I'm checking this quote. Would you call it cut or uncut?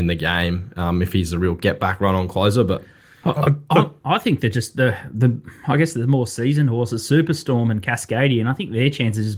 uncut